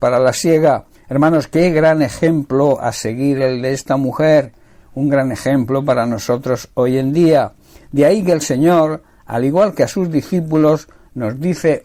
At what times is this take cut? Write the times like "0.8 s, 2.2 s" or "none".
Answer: 0.9 s